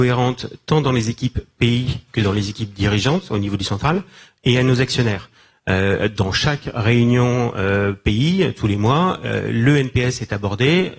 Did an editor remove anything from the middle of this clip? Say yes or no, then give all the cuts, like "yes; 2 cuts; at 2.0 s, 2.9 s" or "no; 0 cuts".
no; 0 cuts